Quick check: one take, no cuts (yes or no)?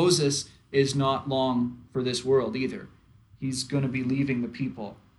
yes